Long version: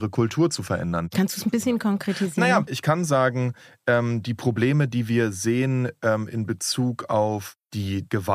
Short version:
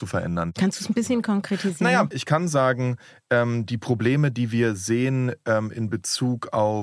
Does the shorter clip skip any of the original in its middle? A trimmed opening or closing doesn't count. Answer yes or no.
no